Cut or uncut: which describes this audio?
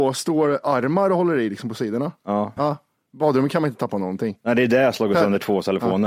cut